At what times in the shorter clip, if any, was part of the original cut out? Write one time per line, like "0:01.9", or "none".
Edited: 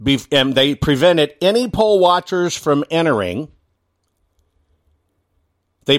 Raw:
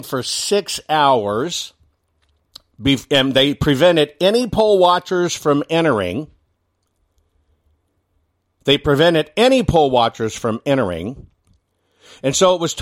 none